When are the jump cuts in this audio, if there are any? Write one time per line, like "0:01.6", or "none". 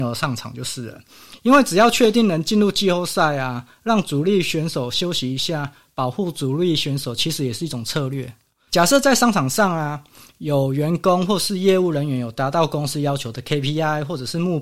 0:08.7